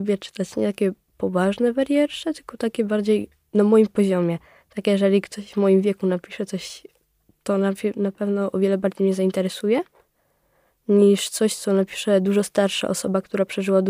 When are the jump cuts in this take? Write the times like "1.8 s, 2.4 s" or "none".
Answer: none